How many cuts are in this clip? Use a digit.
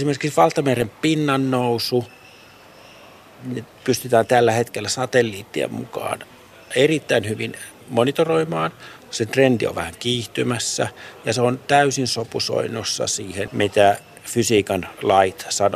2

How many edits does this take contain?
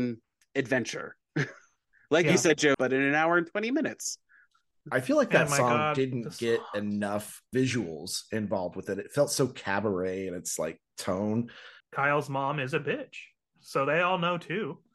2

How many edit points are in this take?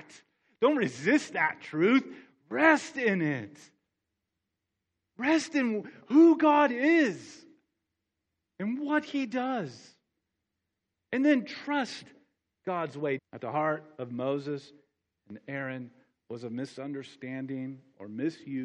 1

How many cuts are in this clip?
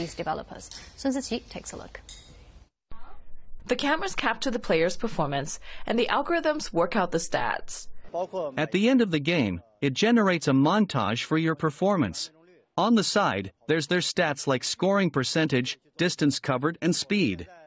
1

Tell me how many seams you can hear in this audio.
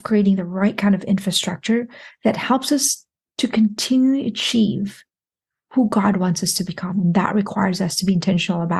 0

